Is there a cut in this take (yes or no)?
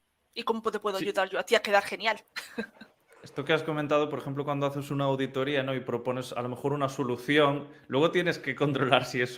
no